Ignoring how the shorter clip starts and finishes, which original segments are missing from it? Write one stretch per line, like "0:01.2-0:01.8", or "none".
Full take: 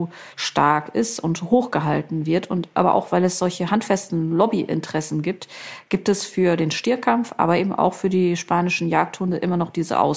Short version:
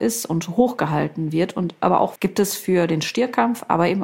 0:03.1-0:05.8